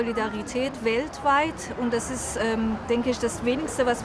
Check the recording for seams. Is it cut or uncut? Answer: uncut